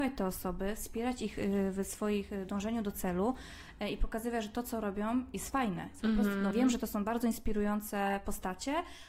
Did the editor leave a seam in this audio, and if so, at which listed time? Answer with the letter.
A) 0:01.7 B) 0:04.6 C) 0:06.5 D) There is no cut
C